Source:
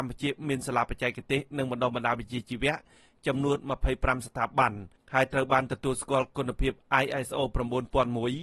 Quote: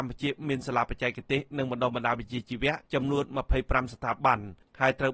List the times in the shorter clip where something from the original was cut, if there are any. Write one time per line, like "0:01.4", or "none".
0:02.8